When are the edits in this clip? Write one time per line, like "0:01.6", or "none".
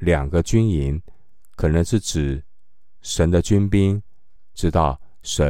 0:04.5